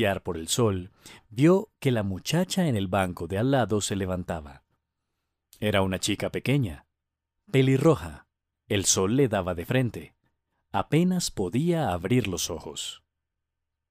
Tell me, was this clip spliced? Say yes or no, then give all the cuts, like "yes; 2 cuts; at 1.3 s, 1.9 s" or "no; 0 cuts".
yes; 1 cut; at 8.5 s